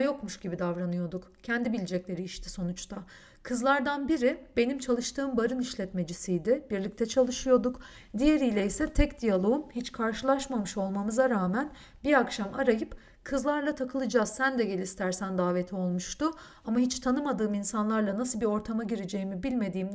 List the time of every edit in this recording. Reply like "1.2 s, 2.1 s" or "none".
none